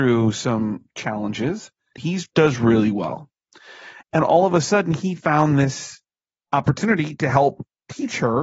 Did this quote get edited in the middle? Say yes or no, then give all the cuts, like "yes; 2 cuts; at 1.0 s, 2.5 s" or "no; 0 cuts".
yes; 2 cuts; at 1.9 s, 4.0 s